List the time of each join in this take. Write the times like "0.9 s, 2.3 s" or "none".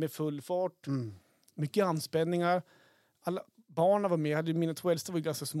1.5 s

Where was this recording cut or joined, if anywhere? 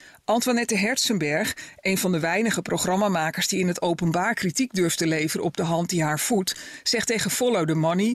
none

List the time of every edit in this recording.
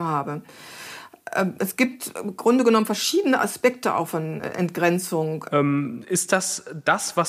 4.1 s, 5.5 s

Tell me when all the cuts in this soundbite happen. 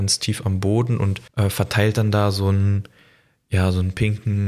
1.3 s

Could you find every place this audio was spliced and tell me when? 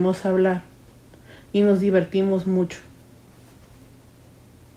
none

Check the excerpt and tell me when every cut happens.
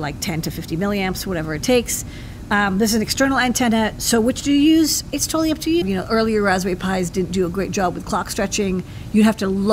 5.8 s

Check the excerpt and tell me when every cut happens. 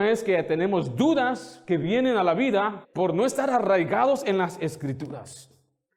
2.8 s

